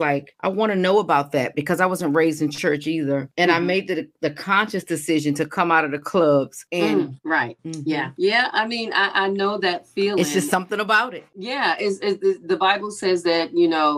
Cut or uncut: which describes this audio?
cut